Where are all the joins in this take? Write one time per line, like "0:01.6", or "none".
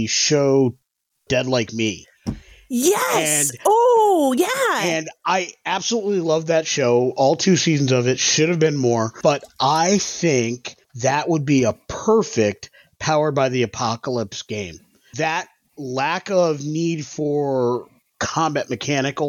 0:10.8
0:15.1